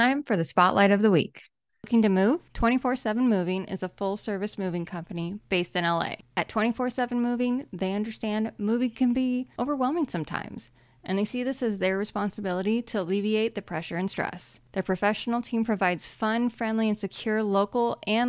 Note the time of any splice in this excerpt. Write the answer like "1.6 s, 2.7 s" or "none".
none